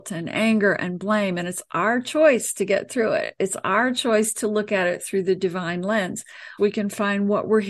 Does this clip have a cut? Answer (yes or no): yes